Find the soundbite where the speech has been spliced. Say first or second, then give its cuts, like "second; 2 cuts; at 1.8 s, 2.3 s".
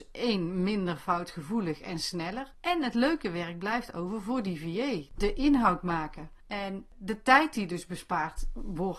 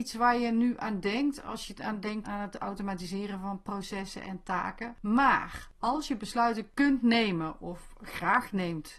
second; 1 cut; at 2.2 s